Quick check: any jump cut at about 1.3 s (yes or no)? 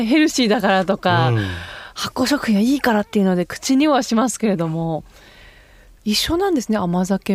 no